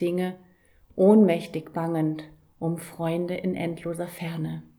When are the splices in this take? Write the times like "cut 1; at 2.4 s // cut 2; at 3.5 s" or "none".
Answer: none